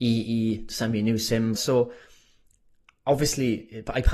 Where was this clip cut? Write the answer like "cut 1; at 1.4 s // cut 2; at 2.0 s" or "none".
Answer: cut 1; at 1.6 s